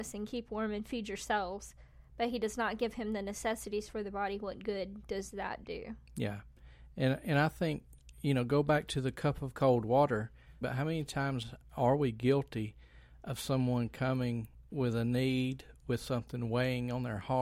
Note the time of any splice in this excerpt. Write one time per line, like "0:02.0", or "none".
0:08.1
0:10.6
0:14.7